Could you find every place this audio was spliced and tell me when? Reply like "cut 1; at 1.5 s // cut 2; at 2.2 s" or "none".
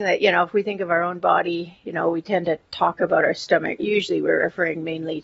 cut 1; at 3.8 s